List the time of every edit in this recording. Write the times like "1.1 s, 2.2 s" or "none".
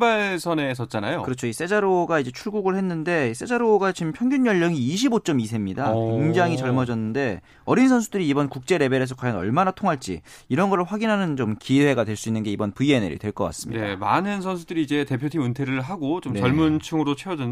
7.5 s